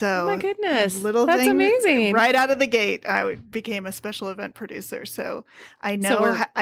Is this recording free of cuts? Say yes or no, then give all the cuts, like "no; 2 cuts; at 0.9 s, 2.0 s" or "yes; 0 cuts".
yes; 0 cuts